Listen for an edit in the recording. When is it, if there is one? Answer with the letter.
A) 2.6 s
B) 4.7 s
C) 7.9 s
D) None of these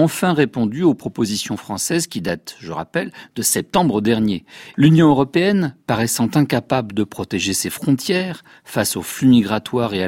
B